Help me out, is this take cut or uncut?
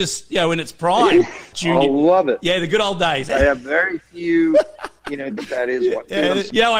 cut